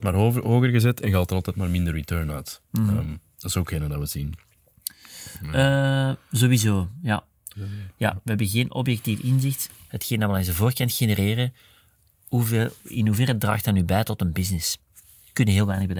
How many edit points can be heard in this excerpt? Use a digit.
1